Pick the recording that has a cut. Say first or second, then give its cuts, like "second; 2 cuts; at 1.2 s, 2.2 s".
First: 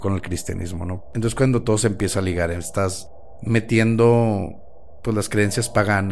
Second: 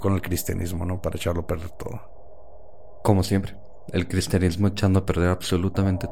first; 1 cut; at 1.0 s